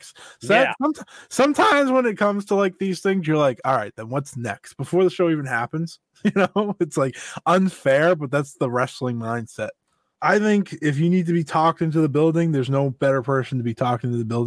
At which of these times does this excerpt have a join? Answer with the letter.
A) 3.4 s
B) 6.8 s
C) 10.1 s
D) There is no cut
C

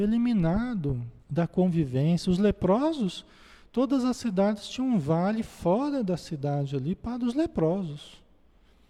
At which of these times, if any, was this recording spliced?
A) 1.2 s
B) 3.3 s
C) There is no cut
A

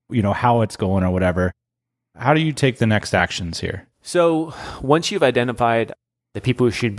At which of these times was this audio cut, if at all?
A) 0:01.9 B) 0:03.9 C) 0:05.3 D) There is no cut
B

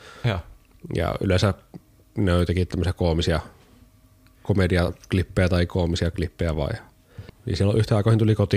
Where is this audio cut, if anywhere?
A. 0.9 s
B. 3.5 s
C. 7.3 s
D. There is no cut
C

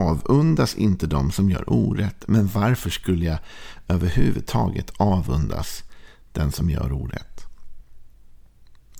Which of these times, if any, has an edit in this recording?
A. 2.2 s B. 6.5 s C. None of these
C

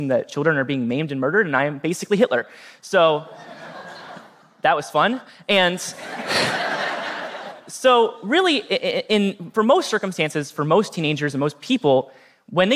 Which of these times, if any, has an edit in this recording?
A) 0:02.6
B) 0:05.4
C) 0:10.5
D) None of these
D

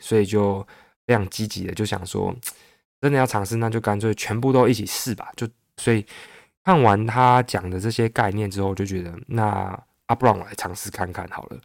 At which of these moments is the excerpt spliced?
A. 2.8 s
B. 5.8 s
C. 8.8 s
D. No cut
B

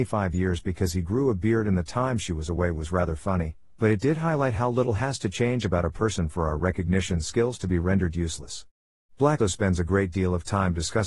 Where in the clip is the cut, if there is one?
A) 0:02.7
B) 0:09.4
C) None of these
B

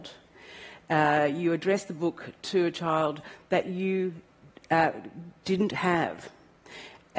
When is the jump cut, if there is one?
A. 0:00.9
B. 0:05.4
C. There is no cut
B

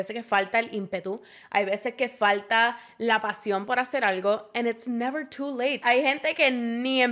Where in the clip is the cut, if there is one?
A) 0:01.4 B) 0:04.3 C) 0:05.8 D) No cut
C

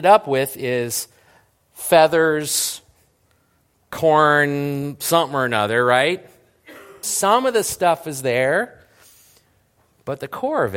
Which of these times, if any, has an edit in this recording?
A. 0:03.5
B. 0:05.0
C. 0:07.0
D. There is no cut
C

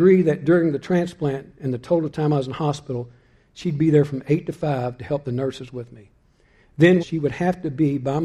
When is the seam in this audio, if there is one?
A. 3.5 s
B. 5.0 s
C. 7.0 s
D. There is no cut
C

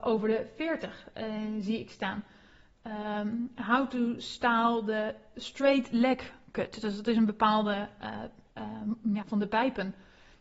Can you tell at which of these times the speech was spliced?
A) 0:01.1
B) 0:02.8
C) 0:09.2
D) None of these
C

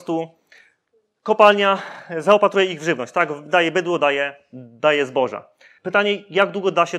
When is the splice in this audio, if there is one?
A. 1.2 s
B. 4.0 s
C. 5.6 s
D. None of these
D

